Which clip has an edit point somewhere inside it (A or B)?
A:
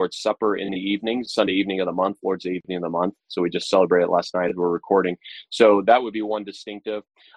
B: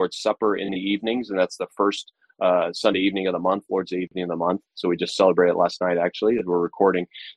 A